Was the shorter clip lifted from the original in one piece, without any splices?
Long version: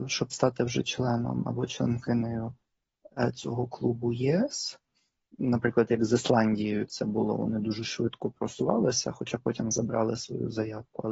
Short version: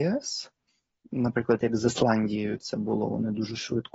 yes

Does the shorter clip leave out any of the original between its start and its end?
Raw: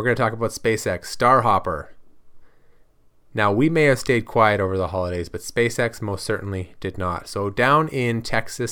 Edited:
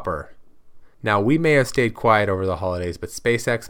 yes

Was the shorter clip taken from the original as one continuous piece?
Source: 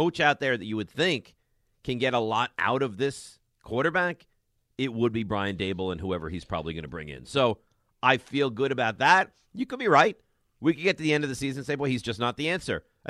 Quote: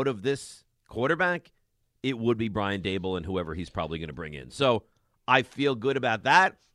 yes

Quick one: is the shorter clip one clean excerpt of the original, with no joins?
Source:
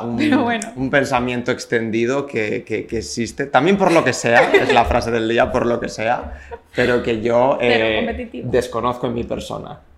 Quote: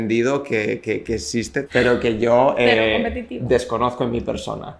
no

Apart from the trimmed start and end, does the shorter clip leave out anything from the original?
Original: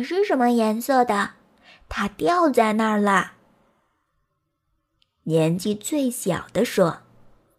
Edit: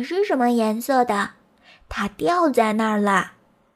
no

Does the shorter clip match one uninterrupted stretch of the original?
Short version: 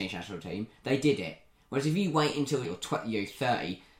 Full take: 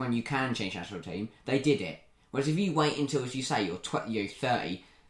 no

